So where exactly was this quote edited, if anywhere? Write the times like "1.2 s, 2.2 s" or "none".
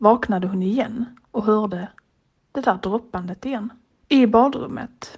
4.0 s